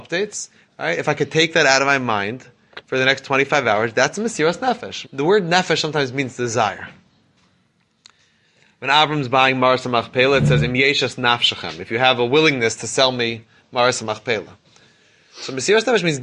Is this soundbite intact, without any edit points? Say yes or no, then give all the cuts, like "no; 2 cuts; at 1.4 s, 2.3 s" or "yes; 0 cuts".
no; 1 cut; at 5.0 s